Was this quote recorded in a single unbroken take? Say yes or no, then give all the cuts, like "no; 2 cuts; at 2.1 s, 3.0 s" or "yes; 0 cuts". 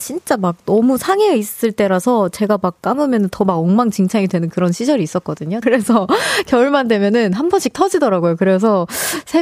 no; 1 cut; at 5.6 s